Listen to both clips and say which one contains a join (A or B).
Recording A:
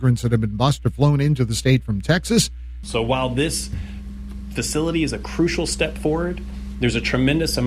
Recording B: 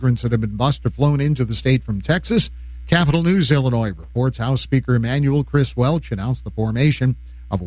A